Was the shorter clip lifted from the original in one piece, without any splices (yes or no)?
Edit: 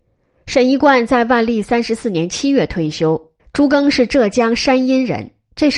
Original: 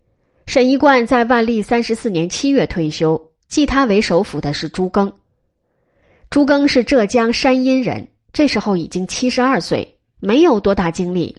no